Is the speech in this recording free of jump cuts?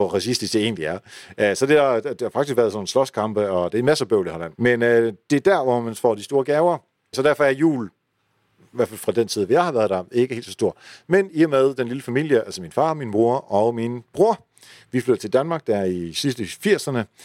no; 2 cuts; at 4.6 s, 7.1 s

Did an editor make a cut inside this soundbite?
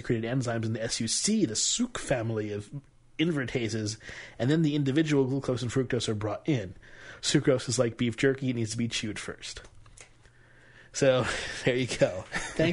yes; 1 cut; at 7.2 s

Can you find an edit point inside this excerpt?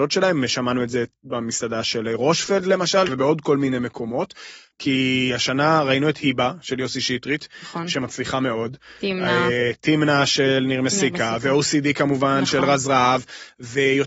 yes; 2 cuts; at 3.1 s, 4.7 s

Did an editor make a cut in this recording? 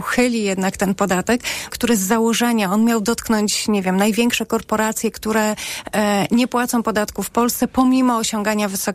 yes; 1 cut; at 1.7 s

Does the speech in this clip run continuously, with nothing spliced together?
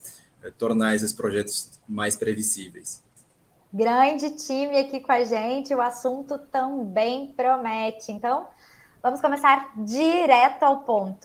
yes; 0 cuts

